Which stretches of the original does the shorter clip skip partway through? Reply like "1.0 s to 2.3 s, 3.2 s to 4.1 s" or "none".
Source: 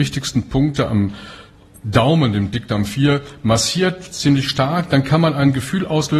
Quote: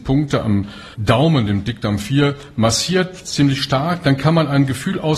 1.4 s to 1.8 s